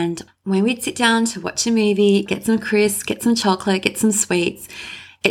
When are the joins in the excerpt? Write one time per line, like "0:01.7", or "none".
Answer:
0:02.3

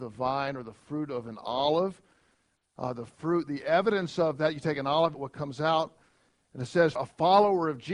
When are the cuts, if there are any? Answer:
0:05.1
0:07.0

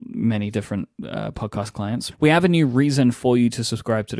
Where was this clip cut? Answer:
0:02.1

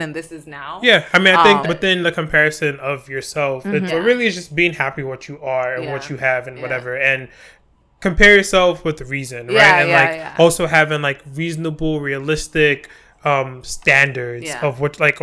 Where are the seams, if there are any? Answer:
0:01.6
0:03.9

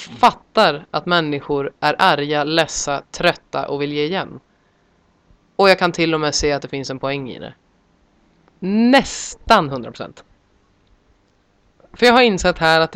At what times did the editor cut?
0:08.6

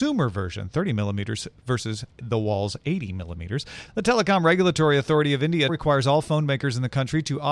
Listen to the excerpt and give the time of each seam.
0:02.1
0:03.9
0:05.7

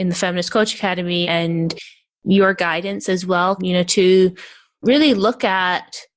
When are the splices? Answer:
0:01.2
0:03.6

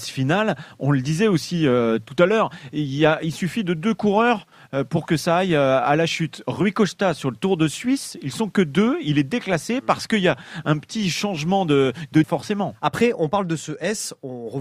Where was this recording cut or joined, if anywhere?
0:12.2

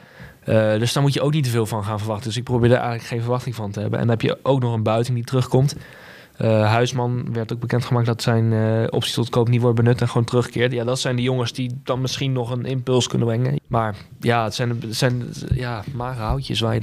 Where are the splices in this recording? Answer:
0:13.6

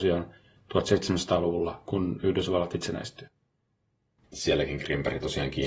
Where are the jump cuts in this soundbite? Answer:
0:04.2

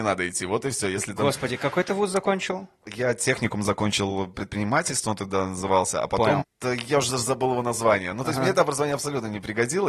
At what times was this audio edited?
0:06.4

